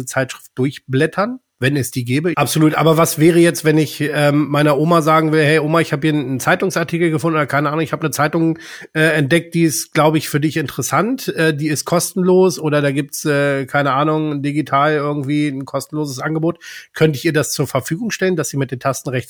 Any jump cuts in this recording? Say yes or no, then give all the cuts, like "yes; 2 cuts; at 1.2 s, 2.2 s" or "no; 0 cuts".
yes; 1 cut; at 2.3 s